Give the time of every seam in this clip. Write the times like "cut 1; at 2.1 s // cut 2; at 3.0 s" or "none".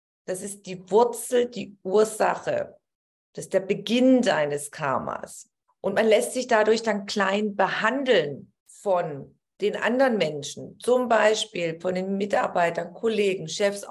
cut 1; at 5.7 s

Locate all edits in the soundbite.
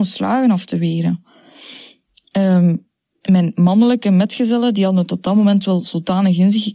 none

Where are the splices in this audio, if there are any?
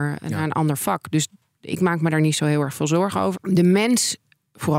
cut 1; at 3.3 s

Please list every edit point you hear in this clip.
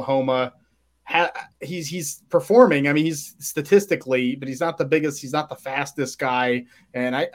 none

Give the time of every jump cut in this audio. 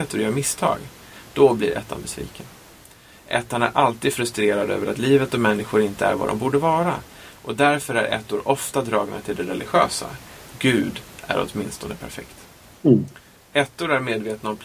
cut 1; at 7.3 s

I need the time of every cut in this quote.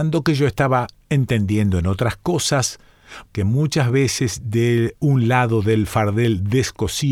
cut 1; at 3.3 s

